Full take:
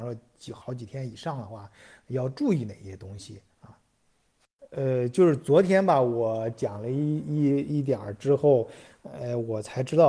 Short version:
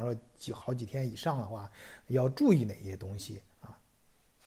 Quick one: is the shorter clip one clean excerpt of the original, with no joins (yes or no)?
yes